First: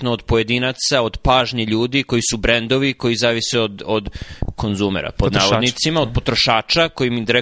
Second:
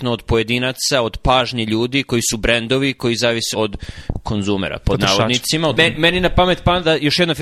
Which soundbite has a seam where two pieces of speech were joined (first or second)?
second